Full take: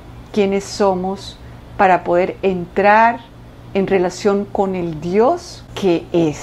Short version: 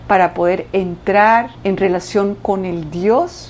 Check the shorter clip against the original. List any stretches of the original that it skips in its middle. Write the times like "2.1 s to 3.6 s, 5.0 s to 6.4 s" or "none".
3.2 s to 3.6 s

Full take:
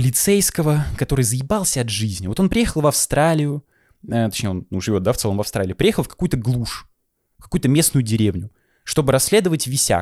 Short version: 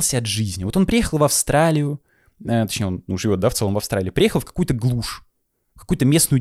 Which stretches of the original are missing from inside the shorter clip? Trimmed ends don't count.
none

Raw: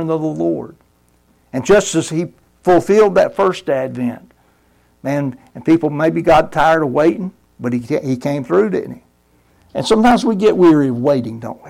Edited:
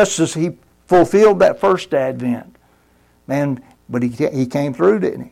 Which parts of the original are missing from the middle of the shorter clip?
5.5 s to 7.5 s

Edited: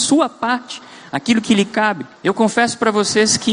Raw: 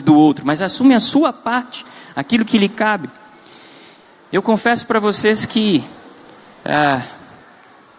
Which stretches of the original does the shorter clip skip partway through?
3.2 s to 4.2 s

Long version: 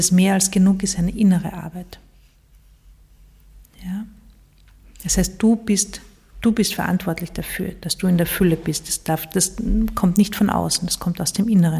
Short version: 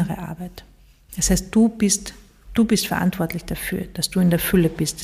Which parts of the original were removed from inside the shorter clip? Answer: 2.4 s to 5.0 s

